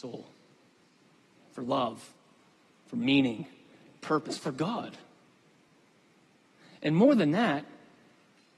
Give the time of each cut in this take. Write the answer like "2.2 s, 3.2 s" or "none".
none